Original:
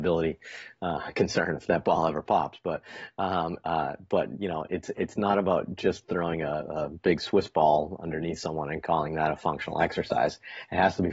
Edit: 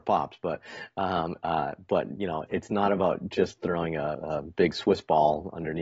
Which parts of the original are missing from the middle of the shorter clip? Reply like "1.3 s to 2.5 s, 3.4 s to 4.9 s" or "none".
4.7 s to 4.9 s